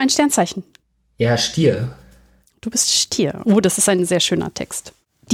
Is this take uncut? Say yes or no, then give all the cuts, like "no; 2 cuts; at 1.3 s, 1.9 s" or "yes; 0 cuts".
no; 1 cut; at 3.4 s